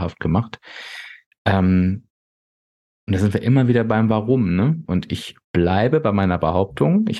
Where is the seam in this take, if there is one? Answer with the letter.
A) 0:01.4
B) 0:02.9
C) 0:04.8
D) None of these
C